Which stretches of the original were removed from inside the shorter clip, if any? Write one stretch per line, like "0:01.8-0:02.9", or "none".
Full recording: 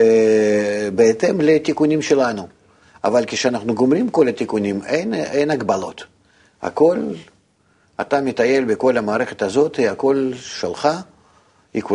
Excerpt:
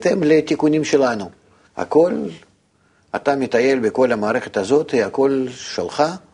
0:02.8-0:06.5

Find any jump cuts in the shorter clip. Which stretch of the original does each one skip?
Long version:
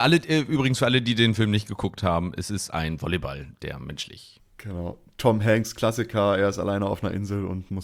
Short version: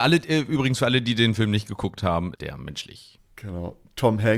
0:02.3-0:03.6

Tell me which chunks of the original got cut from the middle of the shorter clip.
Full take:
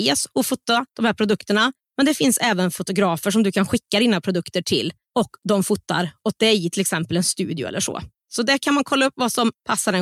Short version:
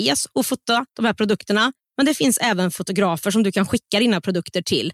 none

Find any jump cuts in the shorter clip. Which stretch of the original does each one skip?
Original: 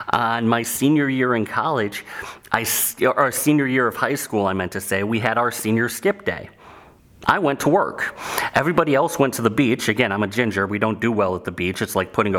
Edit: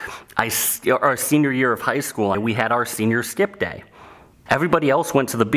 0:04.5-0:05.0
0:07.1-0:08.5

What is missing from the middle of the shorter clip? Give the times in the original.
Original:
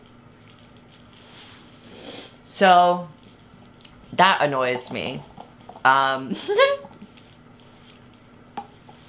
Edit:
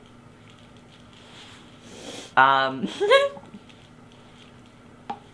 0:02.3-0:05.8

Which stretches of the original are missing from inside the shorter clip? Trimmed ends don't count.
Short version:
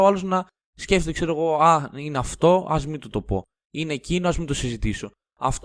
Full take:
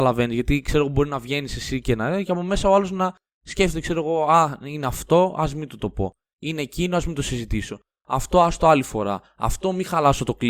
none

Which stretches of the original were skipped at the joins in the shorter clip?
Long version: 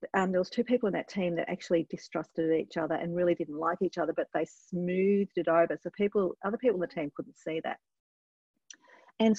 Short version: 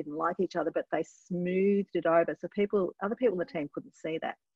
none

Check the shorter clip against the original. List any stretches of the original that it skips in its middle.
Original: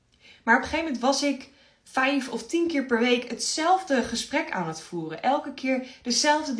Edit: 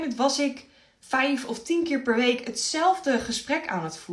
none

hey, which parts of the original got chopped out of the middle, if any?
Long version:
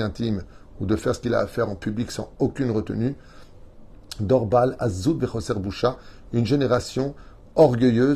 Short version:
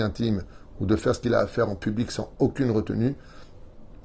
none

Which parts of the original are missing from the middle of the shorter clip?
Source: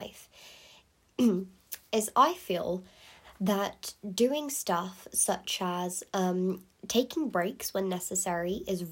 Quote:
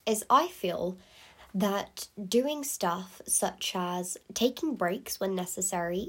0:06.1-0:06.8

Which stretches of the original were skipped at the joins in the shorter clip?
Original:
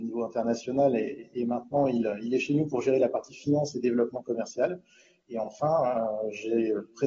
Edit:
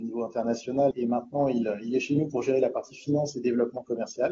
0:00.9-0:01.3

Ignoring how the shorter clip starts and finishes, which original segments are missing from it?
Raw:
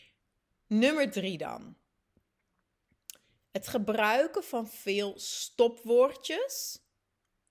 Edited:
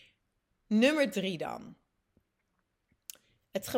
none

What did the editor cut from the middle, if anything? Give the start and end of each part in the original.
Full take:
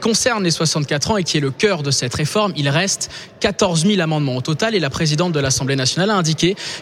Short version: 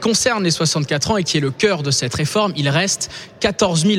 none

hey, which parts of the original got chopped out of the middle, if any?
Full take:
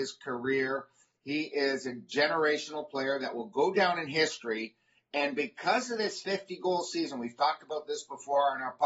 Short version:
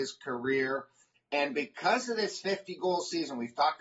0:01.1-0:05.0

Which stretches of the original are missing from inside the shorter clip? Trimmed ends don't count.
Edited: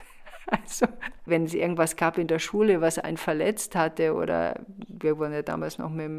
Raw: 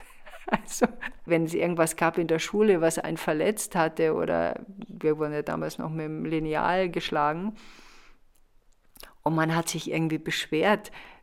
none

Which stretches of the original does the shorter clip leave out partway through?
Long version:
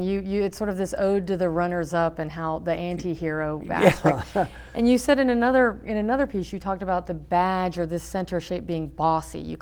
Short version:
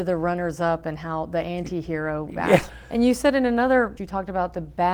0:04.0-0:04.5
0:05.8-0:06.5

